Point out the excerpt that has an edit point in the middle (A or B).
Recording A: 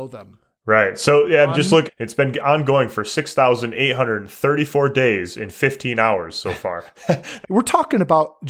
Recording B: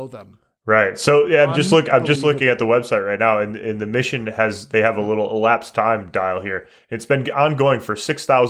A